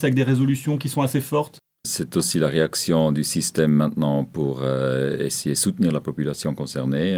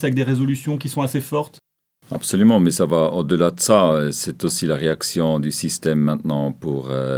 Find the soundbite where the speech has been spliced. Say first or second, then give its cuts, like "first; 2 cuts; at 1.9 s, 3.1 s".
first; 1 cut; at 1.8 s